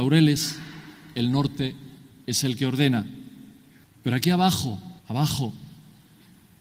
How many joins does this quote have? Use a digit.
2